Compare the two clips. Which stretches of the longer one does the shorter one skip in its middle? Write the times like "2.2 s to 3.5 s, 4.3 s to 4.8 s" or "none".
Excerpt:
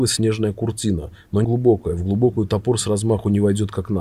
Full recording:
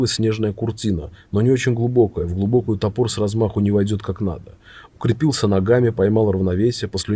1.4 s to 1.8 s